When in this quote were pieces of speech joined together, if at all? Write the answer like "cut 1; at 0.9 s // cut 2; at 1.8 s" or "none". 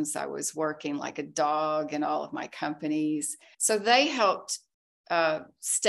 cut 1; at 3.5 s